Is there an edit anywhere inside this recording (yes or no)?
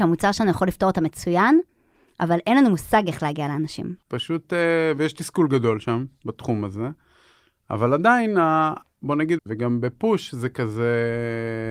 yes